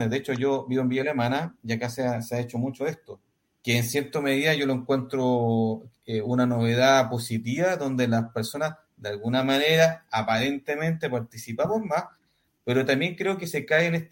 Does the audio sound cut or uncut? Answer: uncut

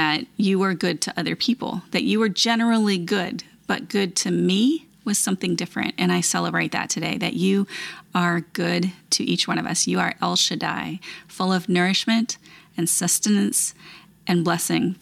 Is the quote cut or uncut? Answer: uncut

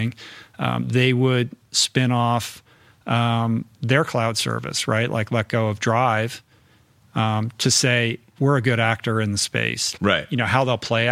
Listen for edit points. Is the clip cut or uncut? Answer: cut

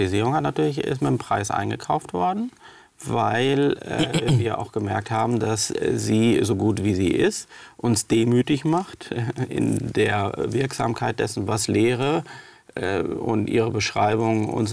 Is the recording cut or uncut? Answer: uncut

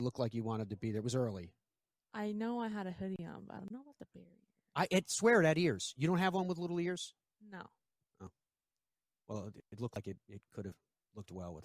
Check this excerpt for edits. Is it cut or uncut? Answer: uncut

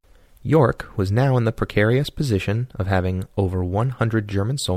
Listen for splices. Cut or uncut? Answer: uncut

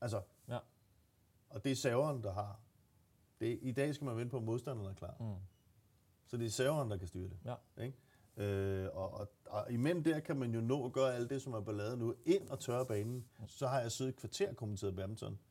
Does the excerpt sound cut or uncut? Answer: cut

